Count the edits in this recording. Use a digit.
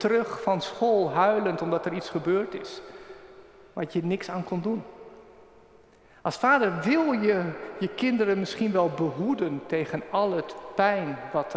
0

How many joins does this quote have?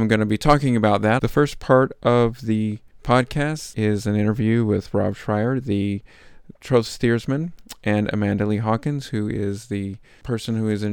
2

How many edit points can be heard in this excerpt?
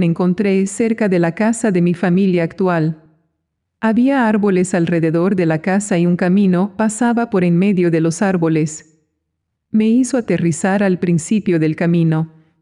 0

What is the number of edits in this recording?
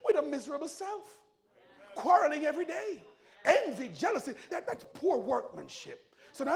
1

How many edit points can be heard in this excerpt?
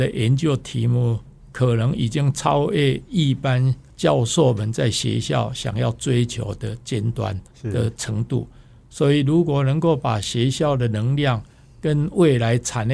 1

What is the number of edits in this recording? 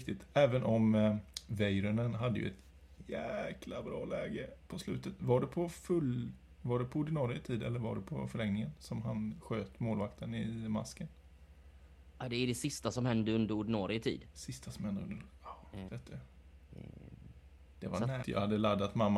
2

